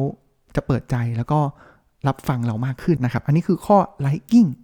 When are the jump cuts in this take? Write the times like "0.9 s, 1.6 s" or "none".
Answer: 3.0 s